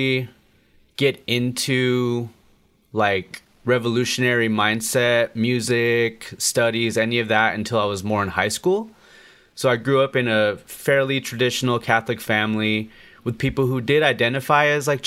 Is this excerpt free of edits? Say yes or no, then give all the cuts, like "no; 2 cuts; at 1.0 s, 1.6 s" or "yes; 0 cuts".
yes; 0 cuts